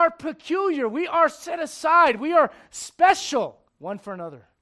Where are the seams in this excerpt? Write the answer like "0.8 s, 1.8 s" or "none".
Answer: 3.7 s

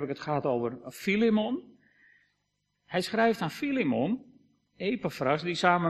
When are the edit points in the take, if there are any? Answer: none

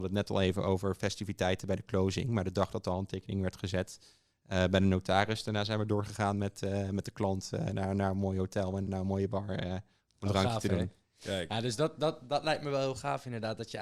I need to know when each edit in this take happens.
8.9 s

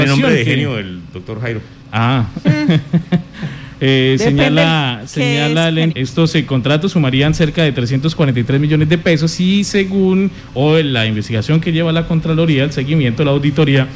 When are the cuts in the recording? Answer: 1.8 s, 5.9 s

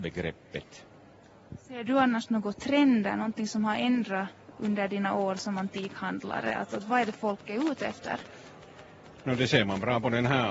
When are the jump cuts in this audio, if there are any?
none

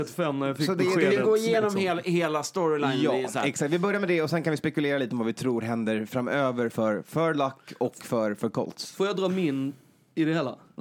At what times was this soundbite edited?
none

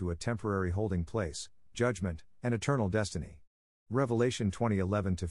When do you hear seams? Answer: 1.7 s, 3.7 s

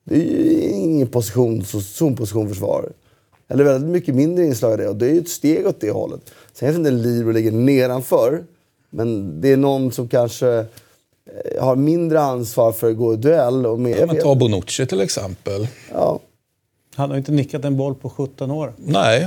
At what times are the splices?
13.9 s

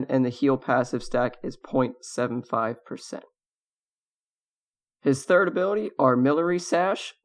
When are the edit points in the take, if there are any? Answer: none

